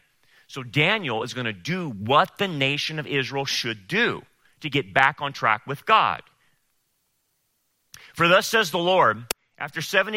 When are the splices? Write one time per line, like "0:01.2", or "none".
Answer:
none